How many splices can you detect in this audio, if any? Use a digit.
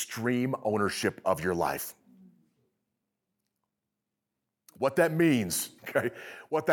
1